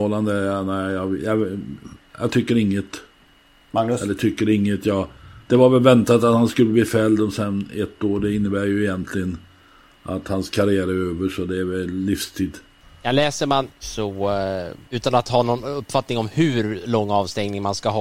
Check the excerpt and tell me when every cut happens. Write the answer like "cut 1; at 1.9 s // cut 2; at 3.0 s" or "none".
cut 1; at 13.7 s // cut 2; at 14.8 s